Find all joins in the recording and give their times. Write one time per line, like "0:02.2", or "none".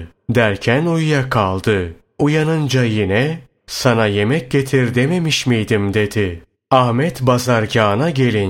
0:03.6
0:06.5